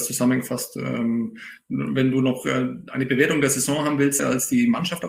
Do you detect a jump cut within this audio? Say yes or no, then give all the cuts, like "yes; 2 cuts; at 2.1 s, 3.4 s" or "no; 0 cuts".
yes; 1 cut; at 4.2 s